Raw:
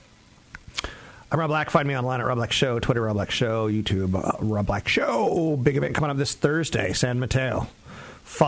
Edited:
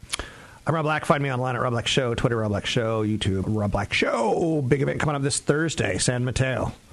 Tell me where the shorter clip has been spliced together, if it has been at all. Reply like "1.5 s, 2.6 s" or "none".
3.4 s